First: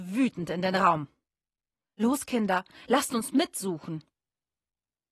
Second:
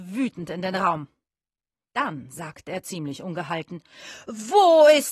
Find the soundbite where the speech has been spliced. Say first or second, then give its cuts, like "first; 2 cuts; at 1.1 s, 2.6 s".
first; 1 cut; at 1.8 s